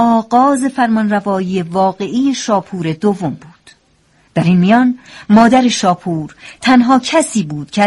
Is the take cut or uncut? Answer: uncut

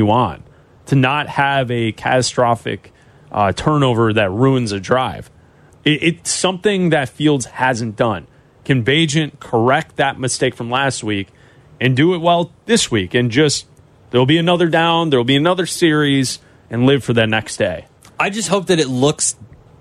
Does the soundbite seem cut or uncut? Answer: uncut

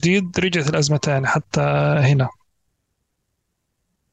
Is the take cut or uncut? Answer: uncut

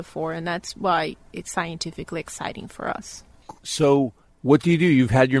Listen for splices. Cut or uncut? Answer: cut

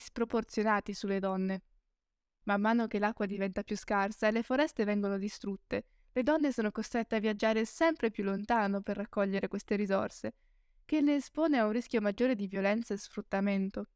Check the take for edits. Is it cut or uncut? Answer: cut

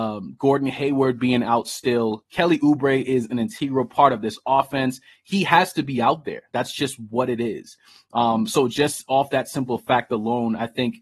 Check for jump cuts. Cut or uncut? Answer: uncut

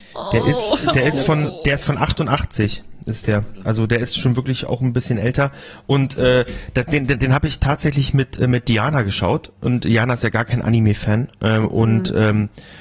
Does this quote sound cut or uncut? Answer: uncut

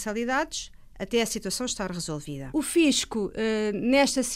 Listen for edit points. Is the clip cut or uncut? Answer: cut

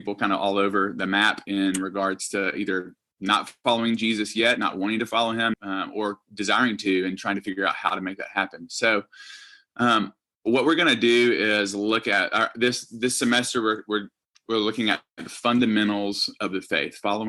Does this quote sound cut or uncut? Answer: cut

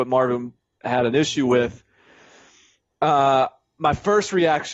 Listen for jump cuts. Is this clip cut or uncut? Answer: uncut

